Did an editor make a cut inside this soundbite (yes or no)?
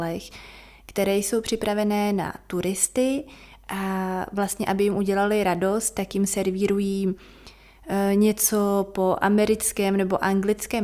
no